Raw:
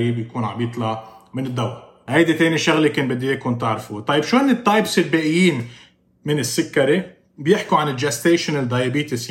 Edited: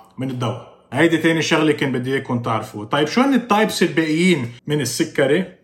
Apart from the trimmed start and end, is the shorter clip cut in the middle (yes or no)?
yes